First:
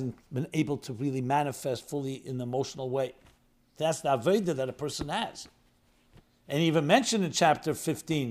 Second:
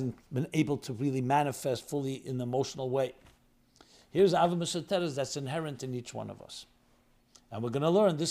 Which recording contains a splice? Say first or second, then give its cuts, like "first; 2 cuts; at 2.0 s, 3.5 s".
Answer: first; 1 cut; at 3.7 s